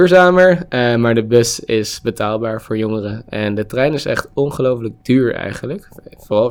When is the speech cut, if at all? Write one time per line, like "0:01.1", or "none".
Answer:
none

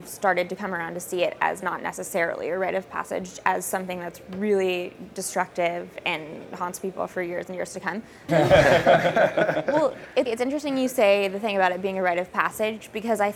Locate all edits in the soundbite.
0:08.3
0:10.3

